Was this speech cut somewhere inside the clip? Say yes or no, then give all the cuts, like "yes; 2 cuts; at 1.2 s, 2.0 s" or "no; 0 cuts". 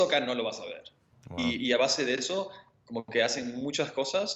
yes; 1 cut; at 1.1 s